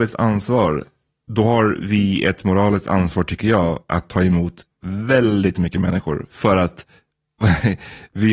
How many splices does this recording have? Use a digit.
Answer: 0